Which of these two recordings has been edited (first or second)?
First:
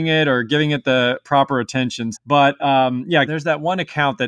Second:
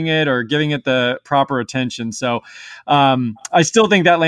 first